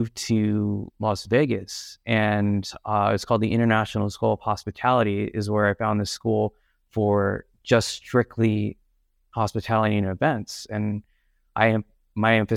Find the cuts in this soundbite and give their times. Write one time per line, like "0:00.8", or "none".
none